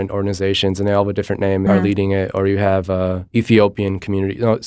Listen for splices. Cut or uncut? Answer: cut